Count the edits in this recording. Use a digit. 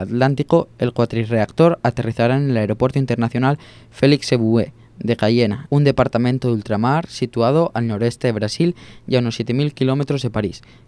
1